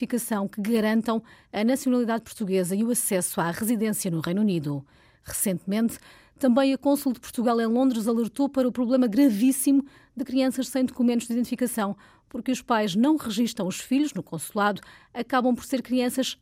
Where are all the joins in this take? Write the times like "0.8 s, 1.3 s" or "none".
none